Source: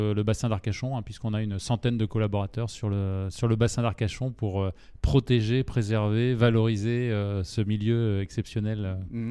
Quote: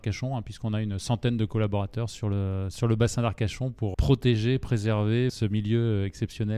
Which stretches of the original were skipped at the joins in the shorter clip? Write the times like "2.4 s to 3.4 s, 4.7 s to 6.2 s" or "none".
4.5 s to 5.0 s, 6.3 s to 7.5 s